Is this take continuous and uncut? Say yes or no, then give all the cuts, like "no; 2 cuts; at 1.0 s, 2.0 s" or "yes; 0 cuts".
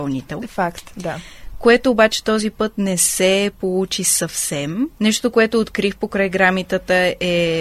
no; 1 cut; at 4.9 s